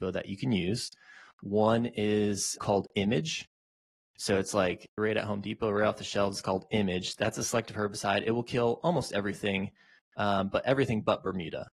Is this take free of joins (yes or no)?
no